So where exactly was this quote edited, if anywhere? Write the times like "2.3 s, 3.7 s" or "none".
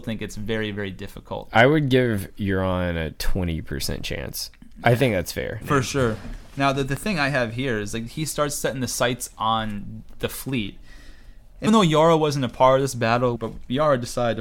5.6 s, 11.7 s, 13.4 s